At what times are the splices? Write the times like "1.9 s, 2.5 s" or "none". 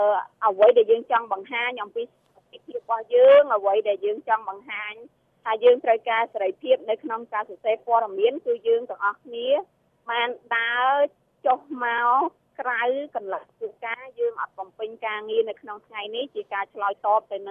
none